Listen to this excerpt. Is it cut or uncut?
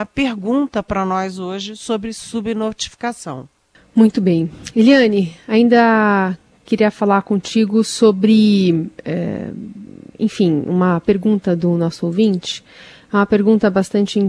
uncut